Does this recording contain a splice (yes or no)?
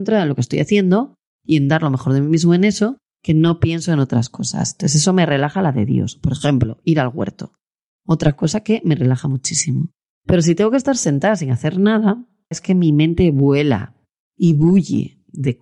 yes